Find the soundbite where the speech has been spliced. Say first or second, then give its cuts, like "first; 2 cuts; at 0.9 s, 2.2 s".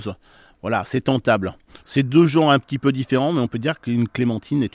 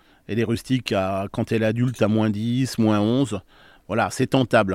first; 1 cut; at 1.8 s